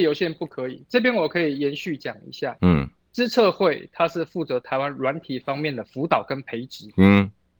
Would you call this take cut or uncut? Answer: uncut